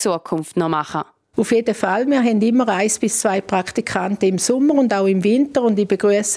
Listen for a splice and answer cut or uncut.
uncut